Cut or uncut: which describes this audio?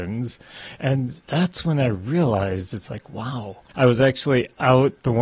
cut